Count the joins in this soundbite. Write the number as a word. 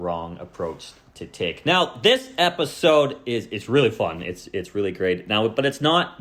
zero